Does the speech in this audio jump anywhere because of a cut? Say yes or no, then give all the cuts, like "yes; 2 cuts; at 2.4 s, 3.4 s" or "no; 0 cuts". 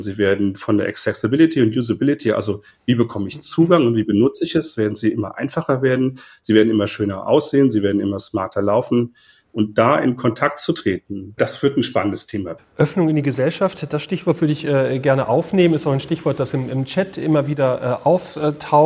no; 0 cuts